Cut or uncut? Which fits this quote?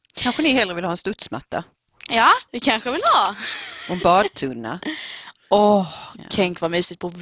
cut